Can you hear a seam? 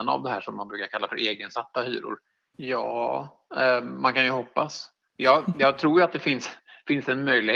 yes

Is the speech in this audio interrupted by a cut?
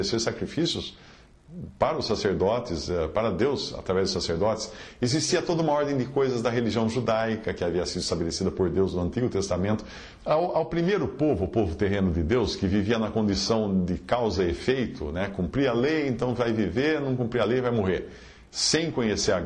yes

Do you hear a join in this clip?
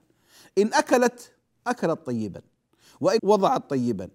yes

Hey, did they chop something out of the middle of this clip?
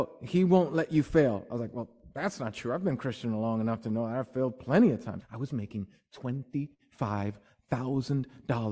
yes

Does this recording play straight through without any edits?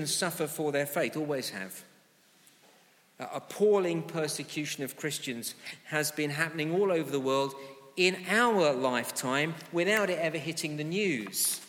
yes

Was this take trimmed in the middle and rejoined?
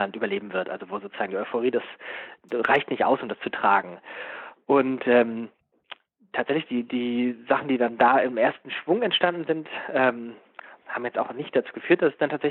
no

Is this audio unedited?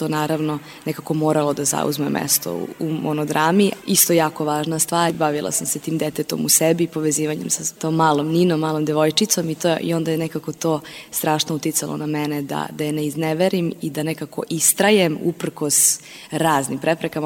yes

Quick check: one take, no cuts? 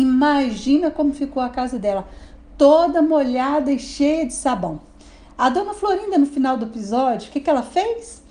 yes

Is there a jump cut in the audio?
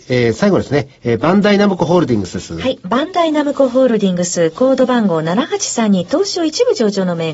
no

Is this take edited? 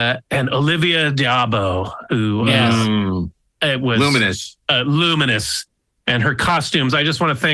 no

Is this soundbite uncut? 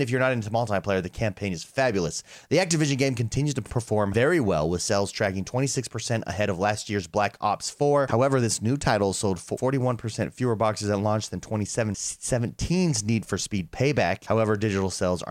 no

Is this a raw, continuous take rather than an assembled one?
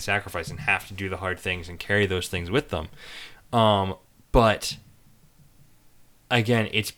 no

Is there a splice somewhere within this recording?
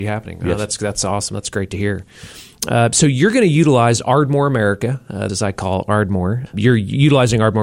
yes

